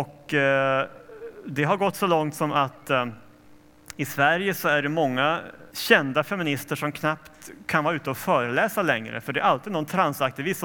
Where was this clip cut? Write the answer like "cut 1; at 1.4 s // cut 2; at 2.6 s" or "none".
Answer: cut 1; at 5.7 s